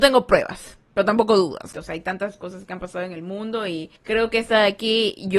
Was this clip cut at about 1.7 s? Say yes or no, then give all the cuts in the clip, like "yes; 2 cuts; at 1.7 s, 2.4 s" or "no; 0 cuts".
yes; 2 cuts; at 1.7 s, 4.0 s